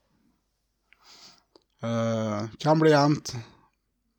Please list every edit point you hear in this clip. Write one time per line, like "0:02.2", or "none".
none